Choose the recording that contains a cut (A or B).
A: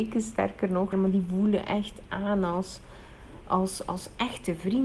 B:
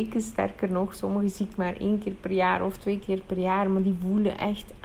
A